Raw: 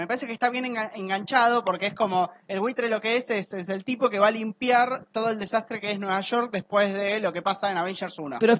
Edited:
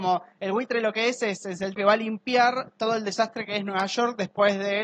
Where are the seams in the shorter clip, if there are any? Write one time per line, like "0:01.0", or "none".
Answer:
0:01.8